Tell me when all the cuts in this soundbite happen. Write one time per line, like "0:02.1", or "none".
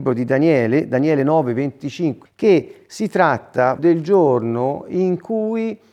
0:02.3
0:03.8